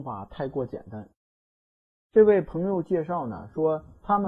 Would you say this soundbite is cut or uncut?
cut